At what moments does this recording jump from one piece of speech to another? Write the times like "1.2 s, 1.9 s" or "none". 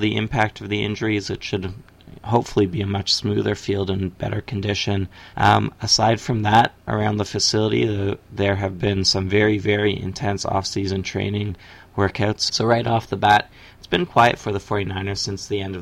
5.3 s, 12.5 s, 14.1 s